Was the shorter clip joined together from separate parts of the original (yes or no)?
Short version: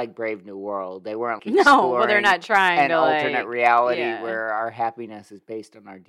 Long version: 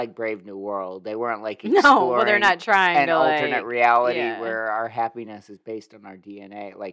yes